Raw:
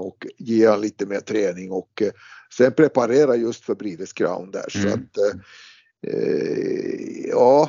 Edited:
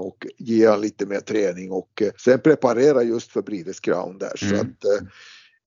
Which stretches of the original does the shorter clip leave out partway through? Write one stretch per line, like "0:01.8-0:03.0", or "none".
0:02.1-0:02.5